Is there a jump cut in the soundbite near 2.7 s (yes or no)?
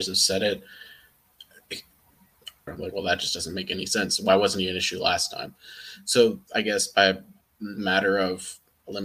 yes